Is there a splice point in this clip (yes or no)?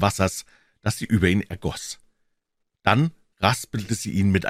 no